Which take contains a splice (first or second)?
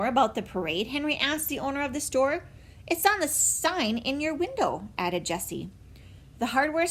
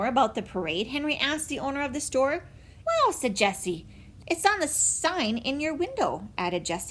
second